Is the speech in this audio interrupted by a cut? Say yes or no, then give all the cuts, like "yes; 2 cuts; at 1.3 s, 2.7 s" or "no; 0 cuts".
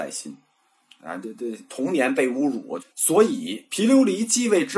yes; 1 cut; at 2.8 s